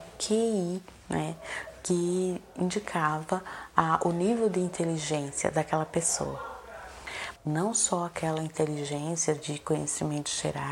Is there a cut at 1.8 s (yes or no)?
no